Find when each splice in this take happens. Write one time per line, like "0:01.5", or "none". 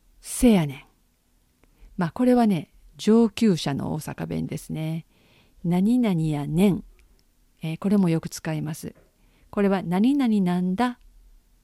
none